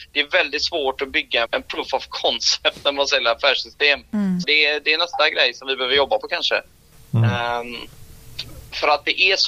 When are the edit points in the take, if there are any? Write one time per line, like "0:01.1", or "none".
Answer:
0:01.4
0:04.4